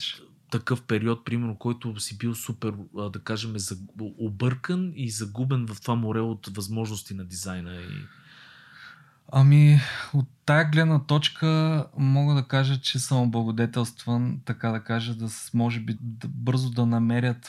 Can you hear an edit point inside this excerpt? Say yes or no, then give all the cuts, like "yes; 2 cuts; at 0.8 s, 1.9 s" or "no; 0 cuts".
yes; 1 cut; at 16.0 s